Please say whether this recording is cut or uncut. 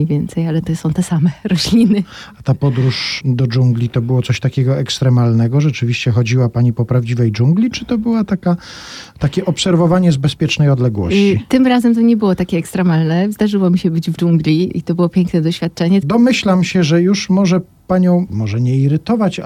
cut